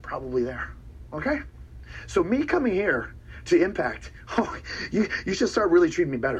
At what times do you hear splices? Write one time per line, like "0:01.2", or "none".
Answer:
none